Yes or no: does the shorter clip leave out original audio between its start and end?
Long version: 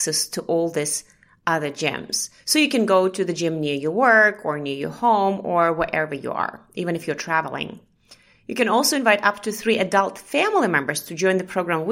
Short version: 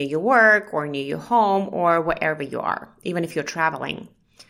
no